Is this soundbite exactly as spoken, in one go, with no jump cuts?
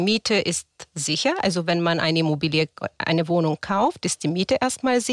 yes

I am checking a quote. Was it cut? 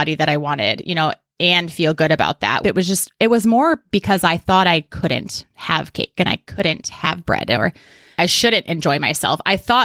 yes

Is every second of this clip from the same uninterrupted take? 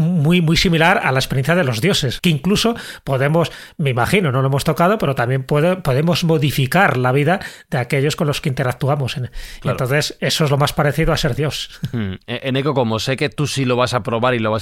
no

